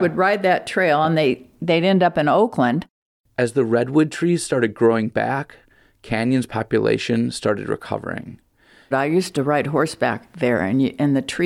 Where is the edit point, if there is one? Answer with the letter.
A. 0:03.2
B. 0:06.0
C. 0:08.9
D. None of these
C